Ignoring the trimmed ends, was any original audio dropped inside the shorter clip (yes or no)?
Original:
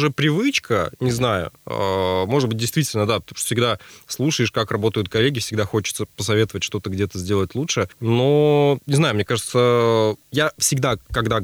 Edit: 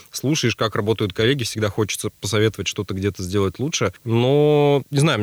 no